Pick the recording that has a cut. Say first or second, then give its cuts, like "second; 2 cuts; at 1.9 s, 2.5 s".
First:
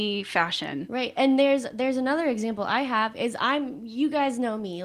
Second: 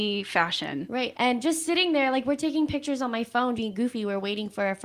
second; 2 cuts; at 1.1 s, 3.6 s